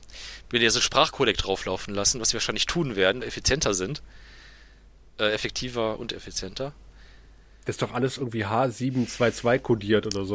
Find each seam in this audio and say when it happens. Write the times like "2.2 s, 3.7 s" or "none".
3.2 s